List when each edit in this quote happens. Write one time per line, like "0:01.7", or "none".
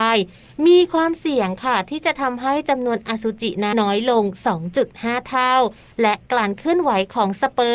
0:03.7